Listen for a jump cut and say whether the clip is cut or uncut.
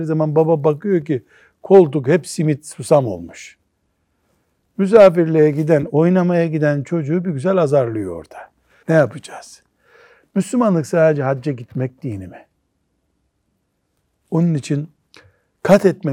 cut